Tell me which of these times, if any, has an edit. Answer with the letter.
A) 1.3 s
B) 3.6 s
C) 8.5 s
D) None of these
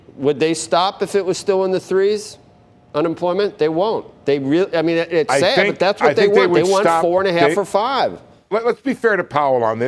C